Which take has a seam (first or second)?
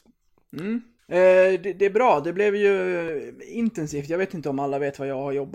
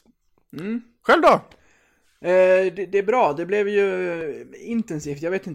first